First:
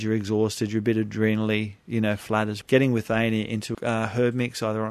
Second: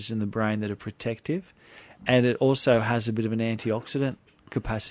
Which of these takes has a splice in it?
first; 2 cuts; at 2.6 s, 3.7 s

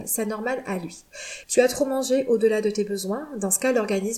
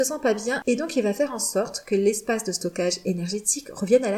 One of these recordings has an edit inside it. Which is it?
first; 1 cut; at 1.4 s

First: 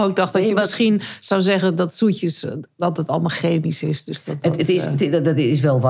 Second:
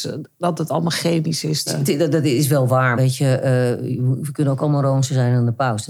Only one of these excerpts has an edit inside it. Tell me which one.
second; 2 cuts; at 1.7 s, 3.0 s

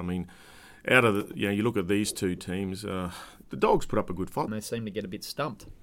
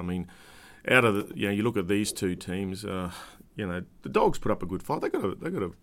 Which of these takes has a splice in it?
first; 2 cuts; at 3.4 s, 4.5 s

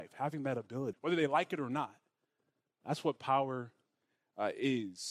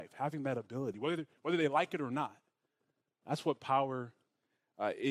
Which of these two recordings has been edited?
first; 1 cut; at 0.9 s

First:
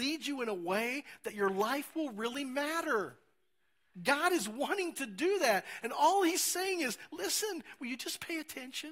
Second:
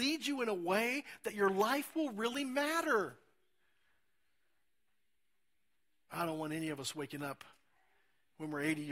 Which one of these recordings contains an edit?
first; 1 cut; at 3.9 s

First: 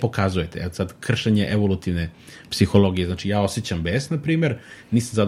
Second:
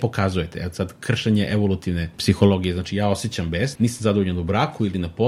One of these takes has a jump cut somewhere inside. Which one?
second; 2 cuts; at 2.1 s, 3.8 s

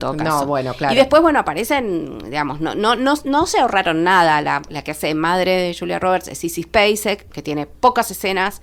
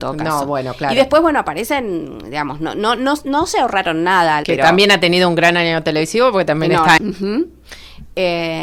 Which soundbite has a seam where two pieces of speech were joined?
second; 2 cuts; at 4.4 s, 7.0 s

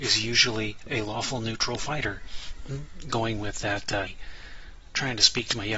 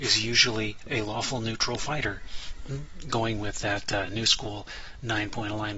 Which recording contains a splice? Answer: first; 1 cut; at 4.1 s

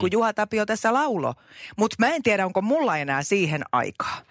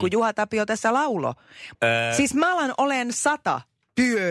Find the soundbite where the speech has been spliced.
second; 1 cut; at 1.7 s

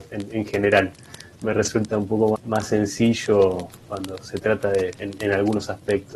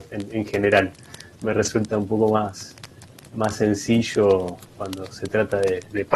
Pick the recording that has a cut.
first; 2 cuts; at 2.3 s, 5.0 s

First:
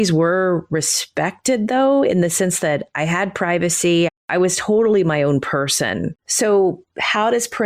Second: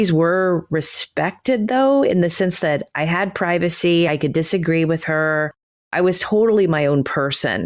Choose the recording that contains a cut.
first; 2 cuts; at 4.1 s, 6.2 s

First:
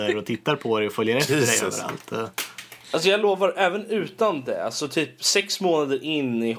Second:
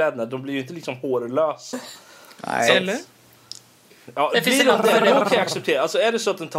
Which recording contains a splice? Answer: first; 1 cut; at 3.2 s

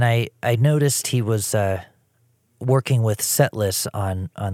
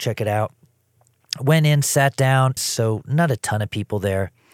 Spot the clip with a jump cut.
second; 1 cut; at 2.6 s

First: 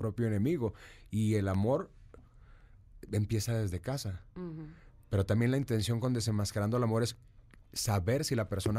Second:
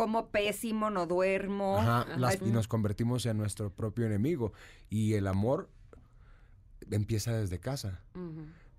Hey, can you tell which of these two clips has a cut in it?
second; 1 cut; at 2.4 s

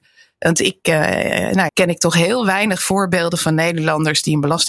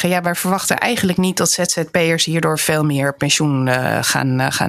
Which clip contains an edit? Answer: first; 1 cut; at 1.7 s

